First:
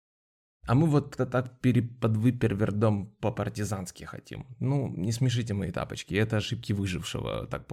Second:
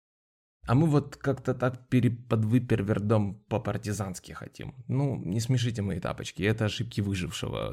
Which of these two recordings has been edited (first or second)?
first